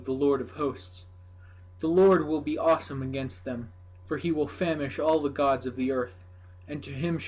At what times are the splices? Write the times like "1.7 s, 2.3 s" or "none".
none